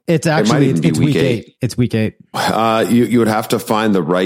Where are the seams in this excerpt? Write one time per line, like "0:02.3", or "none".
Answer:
0:02.3